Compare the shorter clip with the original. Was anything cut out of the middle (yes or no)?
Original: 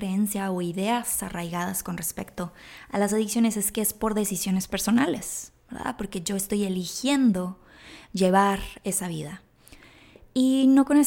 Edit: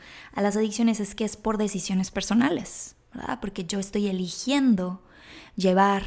no